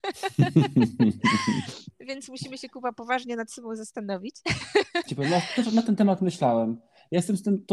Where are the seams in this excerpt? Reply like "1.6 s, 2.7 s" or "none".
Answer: 5.1 s